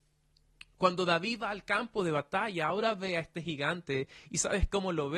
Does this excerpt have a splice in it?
no; 0 cuts

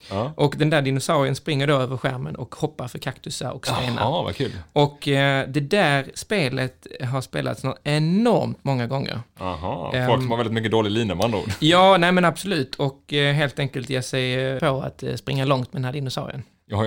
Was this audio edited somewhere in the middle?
yes; 1 cut; at 14.6 s

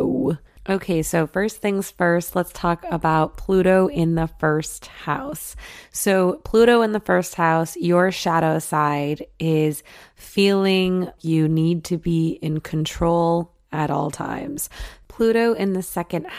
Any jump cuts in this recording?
yes; 2 cuts; at 11.2 s, 15.0 s

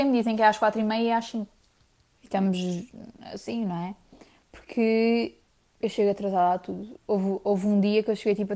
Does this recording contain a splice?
yes; 1 cut; at 2.1 s

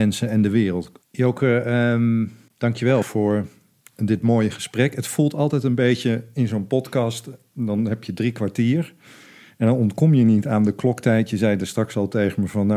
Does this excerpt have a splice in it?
yes; 1 cut; at 1.0 s

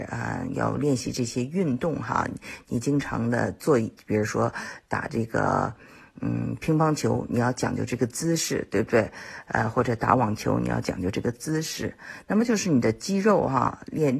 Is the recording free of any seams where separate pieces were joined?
yes; 0 cuts

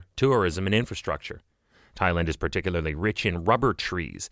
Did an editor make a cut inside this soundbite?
no; 0 cuts

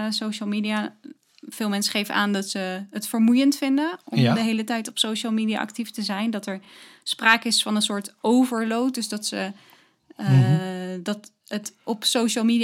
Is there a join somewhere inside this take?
no; 0 cuts

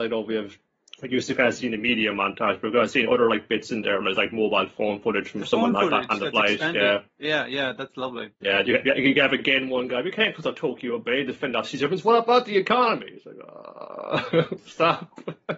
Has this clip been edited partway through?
yes; 1 cut; at 8.3 s

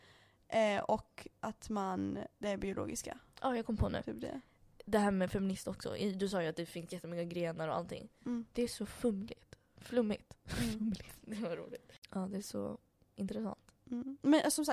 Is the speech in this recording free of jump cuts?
no; 1 cut; at 11.2 s

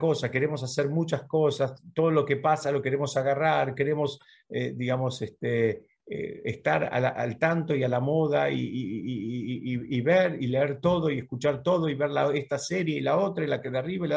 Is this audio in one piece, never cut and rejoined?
yes; 0 cuts

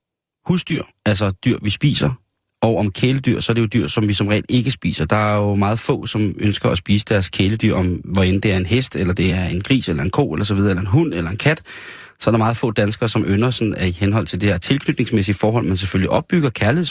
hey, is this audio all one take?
yes; 0 cuts

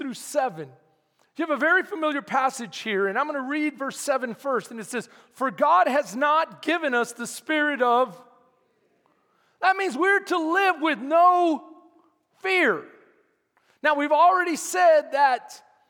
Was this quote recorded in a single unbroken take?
yes; 0 cuts

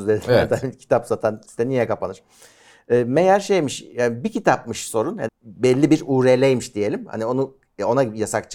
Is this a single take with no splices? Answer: no; 1 cut; at 5.3 s

